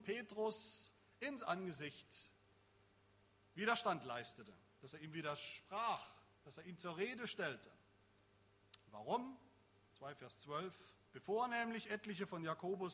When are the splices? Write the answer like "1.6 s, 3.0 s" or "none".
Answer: 9.9 s, 11.1 s